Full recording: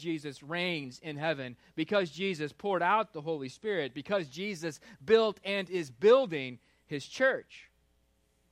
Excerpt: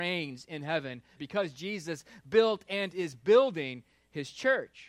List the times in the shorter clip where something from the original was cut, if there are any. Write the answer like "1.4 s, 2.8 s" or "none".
1.2 s